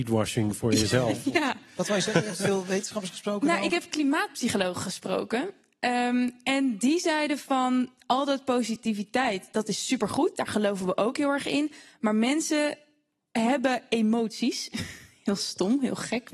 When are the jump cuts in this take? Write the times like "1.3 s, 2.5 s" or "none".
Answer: none